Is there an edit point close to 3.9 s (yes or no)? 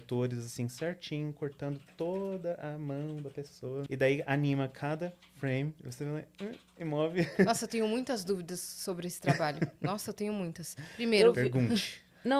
yes